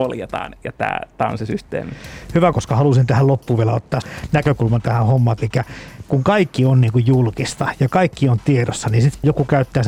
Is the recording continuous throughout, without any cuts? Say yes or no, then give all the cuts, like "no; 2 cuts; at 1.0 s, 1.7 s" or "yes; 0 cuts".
no; 2 cuts; at 2.5 s, 5.4 s